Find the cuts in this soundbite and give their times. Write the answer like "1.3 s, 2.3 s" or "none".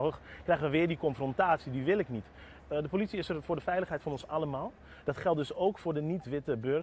2.6 s

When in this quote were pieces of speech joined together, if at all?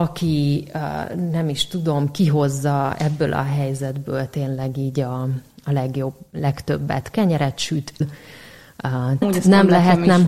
8.0 s, 9.2 s

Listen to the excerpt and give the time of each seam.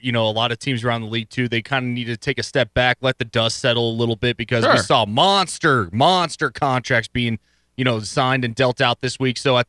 none

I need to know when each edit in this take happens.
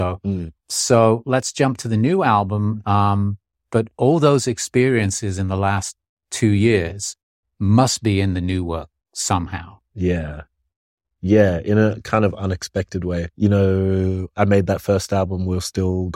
2.8 s, 13.3 s

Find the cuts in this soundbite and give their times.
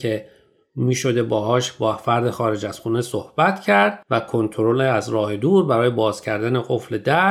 4.0 s

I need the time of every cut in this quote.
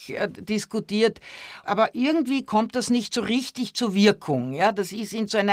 1.6 s

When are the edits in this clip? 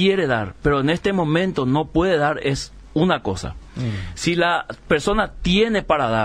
none

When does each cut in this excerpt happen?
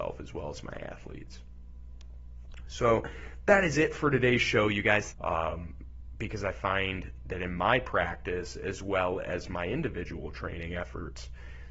5.1 s

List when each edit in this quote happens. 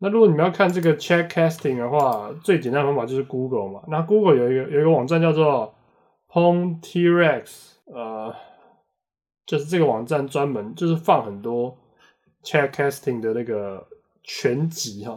none

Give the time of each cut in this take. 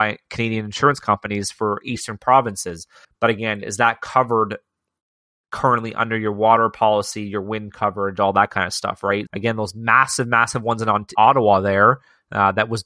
3.0 s, 9.3 s, 11.2 s

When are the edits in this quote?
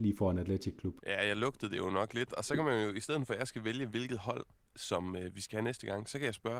1.0 s

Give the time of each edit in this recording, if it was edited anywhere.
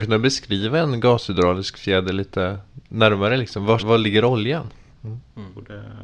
3.8 s, 4.9 s

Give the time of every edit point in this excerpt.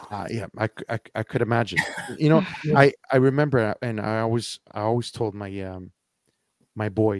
none

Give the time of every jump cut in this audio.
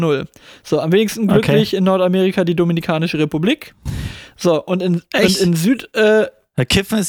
none

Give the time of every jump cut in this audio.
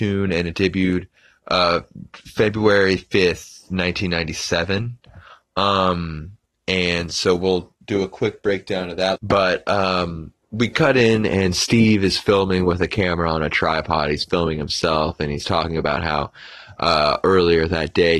9.2 s

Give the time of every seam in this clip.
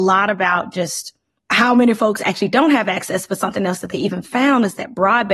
1.4 s

